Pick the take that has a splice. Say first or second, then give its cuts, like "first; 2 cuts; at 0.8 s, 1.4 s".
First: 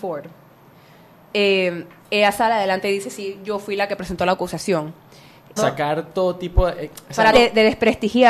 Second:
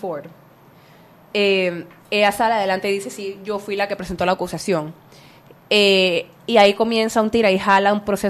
first; 2 cuts; at 5.6 s, 7.3 s